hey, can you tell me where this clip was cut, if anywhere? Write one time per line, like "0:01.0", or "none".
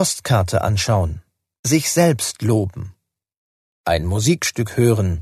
0:01.6